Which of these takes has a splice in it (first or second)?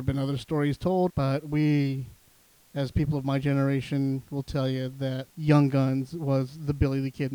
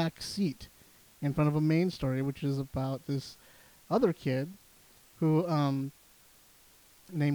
first